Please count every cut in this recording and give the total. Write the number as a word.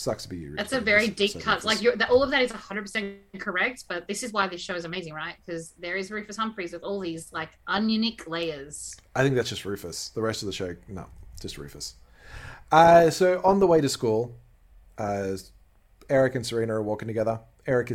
zero